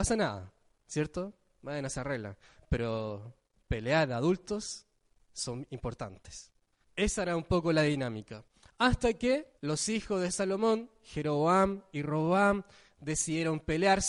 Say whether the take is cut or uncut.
cut